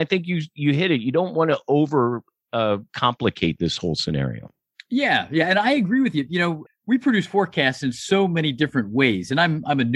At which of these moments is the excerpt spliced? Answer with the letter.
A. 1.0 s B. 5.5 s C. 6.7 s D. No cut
C